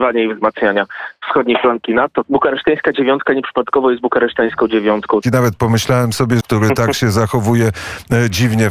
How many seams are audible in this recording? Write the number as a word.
three